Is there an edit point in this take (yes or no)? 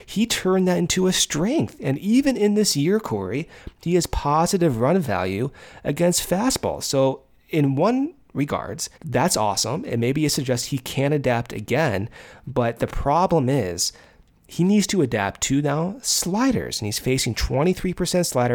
yes